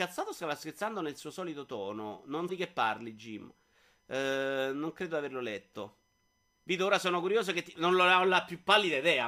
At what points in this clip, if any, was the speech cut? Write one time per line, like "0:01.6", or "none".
0:02.5
0:06.6